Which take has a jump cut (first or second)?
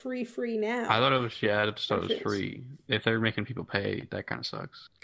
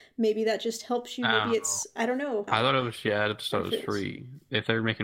second